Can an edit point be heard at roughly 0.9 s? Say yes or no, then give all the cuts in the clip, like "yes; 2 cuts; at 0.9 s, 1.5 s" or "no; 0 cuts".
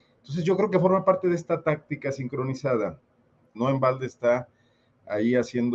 no; 1 cut; at 3.5 s